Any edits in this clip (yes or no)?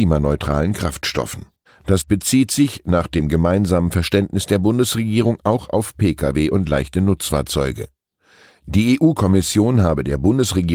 yes